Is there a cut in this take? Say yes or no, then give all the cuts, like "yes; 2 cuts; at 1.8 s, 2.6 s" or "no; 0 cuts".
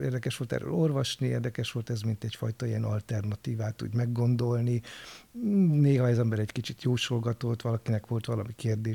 no; 0 cuts